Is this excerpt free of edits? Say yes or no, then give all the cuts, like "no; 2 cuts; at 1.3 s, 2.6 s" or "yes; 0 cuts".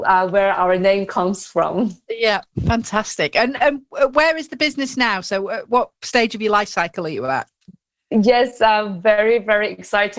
yes; 0 cuts